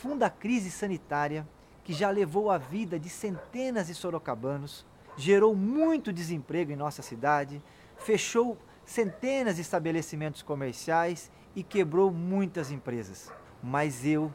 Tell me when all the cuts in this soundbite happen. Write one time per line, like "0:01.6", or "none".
0:13.4